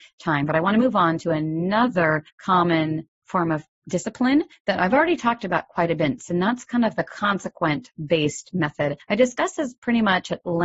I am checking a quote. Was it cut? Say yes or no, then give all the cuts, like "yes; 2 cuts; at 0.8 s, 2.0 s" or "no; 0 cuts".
no; 0 cuts